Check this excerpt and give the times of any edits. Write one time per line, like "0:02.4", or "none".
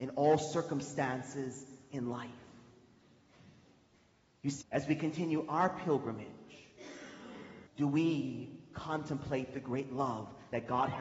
0:04.6
0:07.7